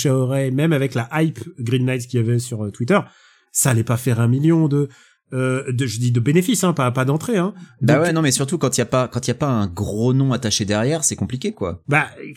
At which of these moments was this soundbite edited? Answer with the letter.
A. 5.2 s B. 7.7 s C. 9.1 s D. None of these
D